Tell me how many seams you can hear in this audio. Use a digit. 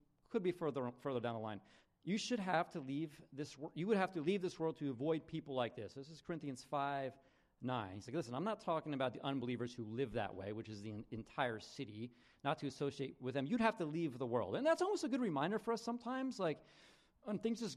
1